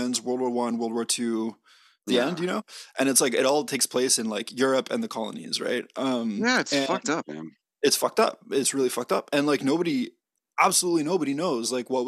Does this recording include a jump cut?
no; 0 cuts

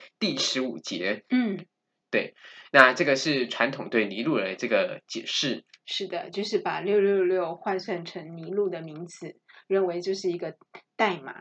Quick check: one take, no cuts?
yes; 0 cuts

